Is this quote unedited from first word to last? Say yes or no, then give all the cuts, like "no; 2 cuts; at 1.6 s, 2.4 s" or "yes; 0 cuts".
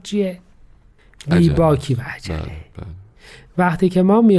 yes; 0 cuts